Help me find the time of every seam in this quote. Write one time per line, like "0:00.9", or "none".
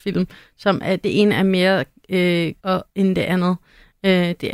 0:02.6